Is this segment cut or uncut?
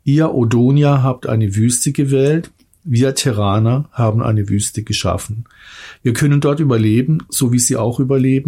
uncut